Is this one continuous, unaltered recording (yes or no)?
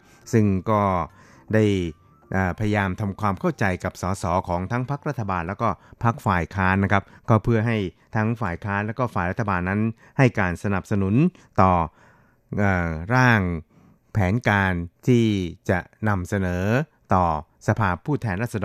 no